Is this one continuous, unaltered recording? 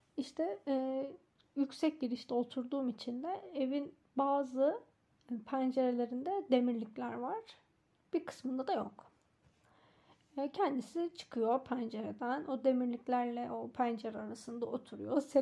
yes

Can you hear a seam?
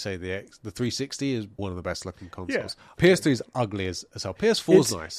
yes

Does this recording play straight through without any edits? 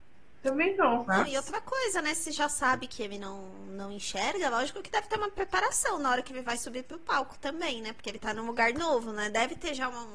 yes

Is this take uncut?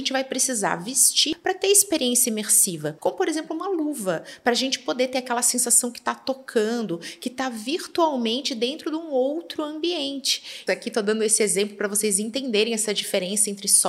no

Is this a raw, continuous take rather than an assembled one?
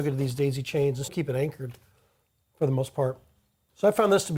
no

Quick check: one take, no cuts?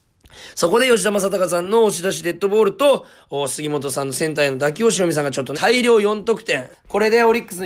no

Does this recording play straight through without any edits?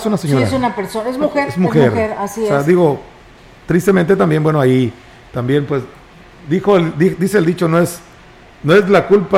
yes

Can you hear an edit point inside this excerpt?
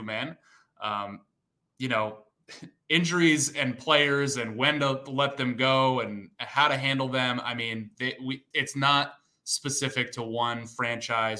yes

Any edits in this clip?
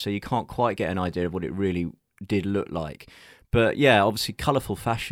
no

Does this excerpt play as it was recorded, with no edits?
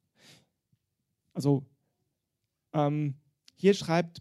yes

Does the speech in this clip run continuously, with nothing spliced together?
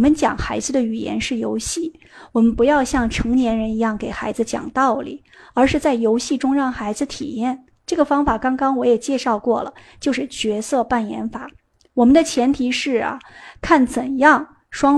yes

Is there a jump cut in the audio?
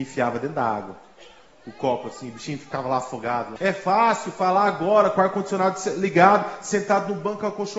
yes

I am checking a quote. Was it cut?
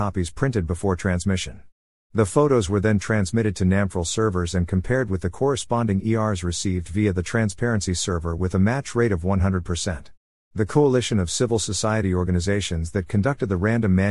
yes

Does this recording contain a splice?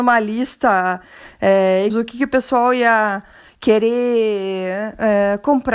yes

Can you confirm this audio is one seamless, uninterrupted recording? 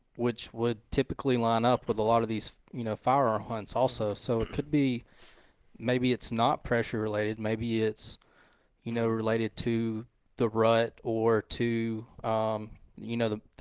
yes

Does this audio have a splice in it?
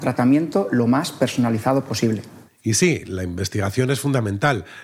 no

